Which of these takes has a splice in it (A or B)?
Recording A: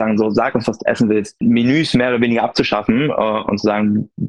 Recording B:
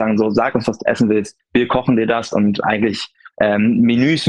A